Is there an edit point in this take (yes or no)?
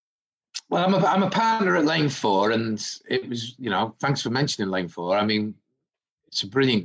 no